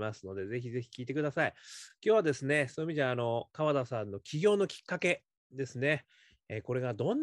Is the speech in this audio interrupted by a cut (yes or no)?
no